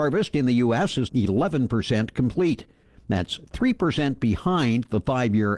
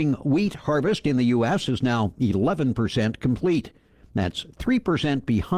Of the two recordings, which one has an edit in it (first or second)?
first